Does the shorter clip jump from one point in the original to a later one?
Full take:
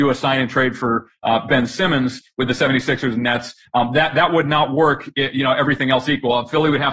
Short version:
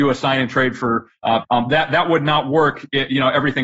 yes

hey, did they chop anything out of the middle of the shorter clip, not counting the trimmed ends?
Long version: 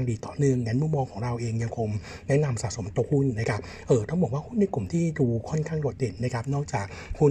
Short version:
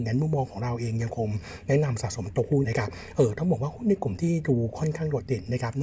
yes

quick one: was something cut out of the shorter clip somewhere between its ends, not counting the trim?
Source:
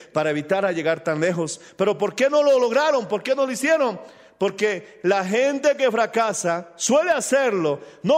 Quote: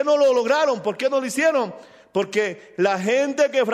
no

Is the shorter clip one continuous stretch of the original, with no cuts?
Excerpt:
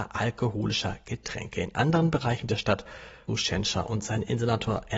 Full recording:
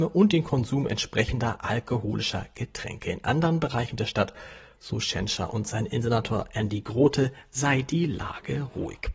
no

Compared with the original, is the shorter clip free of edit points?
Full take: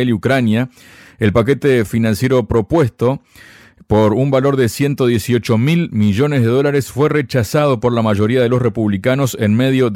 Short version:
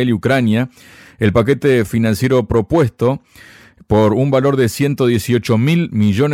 yes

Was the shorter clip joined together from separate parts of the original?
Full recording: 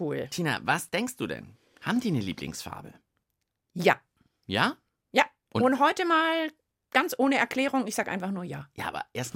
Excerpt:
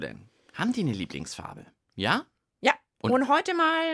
yes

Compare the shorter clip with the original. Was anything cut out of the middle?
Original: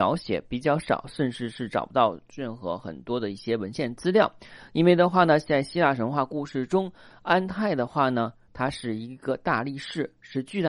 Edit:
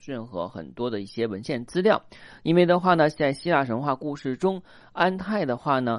no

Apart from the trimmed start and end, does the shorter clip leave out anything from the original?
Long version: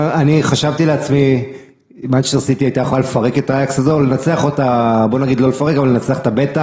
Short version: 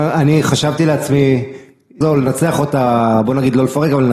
yes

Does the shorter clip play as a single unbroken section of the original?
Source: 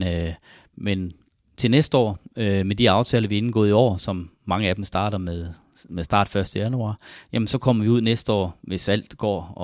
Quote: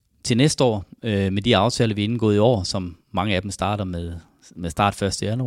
yes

